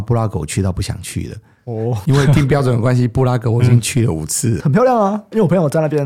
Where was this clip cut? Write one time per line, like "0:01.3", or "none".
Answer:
0:04.6